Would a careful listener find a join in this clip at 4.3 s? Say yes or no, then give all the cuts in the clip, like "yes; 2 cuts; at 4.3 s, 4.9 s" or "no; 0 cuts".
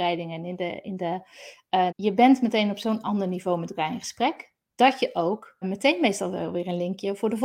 no; 2 cuts; at 1.9 s, 5.6 s